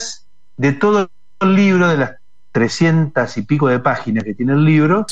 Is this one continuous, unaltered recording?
yes; 0 cuts

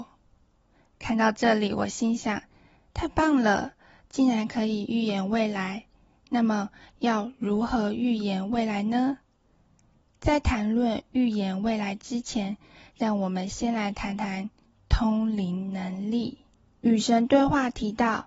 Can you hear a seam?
no; 0 cuts

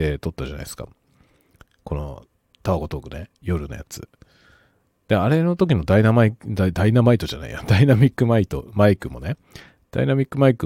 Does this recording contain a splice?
no; 0 cuts

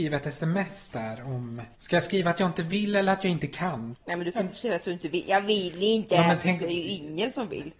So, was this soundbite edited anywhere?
yes; 2 cuts; at 1.7 s, 3.9 s

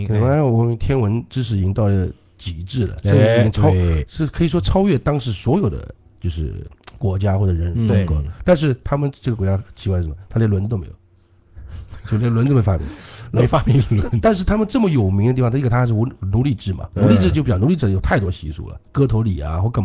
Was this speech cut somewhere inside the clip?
yes; 1 cut; at 18.8 s

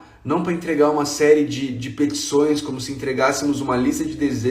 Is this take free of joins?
yes; 0 cuts

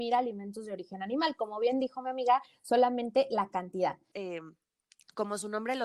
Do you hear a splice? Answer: yes; 1 cut; at 4.1 s

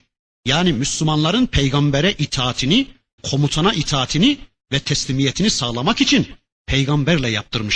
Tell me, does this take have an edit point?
yes; 1 cut; at 3.2 s

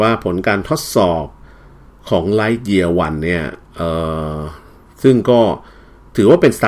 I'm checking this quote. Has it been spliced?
no; 0 cuts

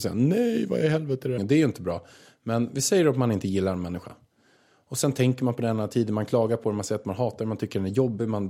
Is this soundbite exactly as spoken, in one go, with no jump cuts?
no; 1 cut; at 1.4 s

